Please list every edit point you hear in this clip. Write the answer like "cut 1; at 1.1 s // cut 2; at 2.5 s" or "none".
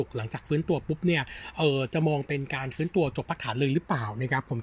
none